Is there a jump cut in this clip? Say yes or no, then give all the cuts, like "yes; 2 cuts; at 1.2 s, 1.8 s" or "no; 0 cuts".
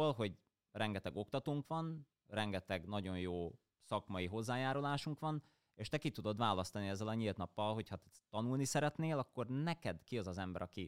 no; 0 cuts